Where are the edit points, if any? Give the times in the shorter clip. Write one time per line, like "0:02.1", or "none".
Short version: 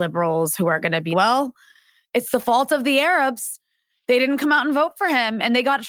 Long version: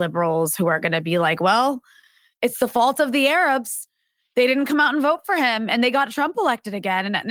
0:01.1